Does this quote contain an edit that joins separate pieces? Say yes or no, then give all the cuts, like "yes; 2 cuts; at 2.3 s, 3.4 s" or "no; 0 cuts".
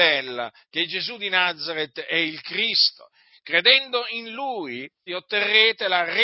yes; 1 cut; at 5.1 s